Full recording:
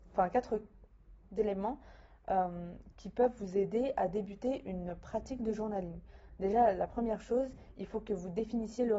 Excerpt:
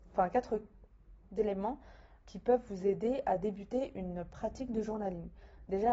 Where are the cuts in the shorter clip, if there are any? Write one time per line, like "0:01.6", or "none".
0:02.2